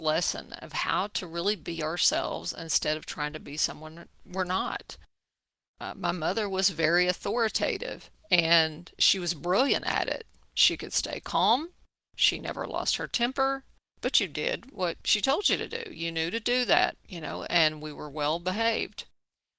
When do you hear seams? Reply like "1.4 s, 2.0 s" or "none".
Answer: none